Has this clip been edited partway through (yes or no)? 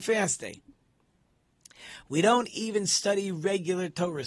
no